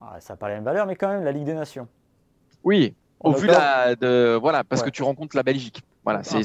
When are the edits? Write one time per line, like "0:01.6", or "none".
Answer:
none